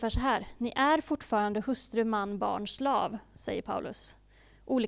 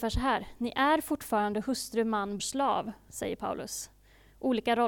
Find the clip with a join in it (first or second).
second